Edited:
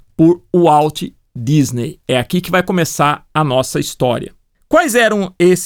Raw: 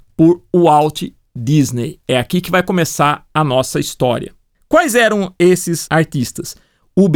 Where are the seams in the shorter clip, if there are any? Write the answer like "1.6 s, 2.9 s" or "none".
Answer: none

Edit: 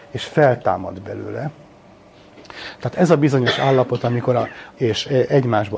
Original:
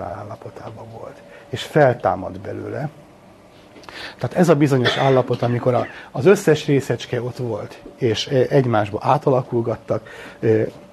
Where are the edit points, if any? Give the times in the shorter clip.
4.7 s

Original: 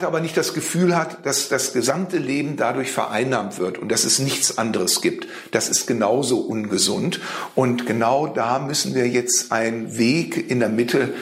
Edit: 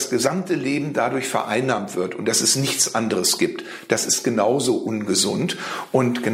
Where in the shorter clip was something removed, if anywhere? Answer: none

